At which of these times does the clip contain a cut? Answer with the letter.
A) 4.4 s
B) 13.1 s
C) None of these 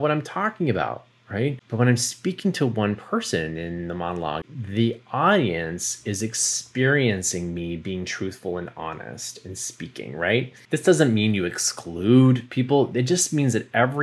A